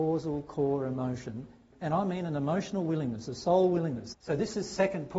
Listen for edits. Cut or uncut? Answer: cut